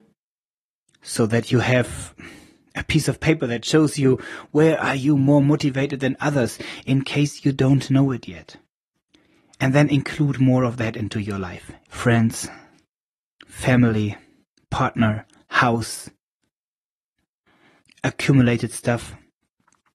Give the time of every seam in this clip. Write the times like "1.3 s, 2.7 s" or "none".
11.9 s